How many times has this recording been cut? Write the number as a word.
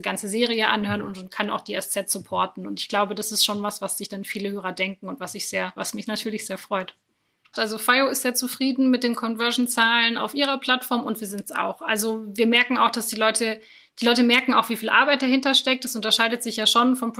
two